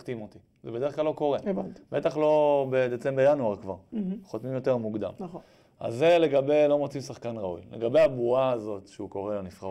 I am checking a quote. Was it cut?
no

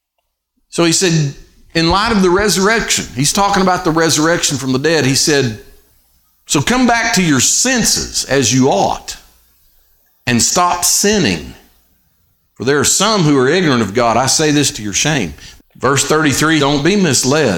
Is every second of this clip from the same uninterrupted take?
no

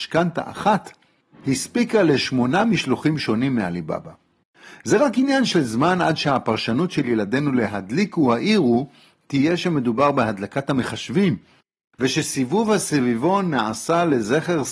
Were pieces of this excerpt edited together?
no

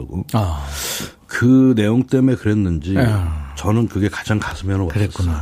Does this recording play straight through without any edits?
yes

